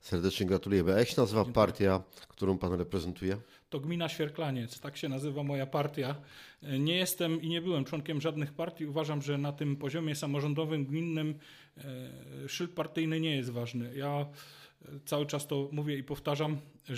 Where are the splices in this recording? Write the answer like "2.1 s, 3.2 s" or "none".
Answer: none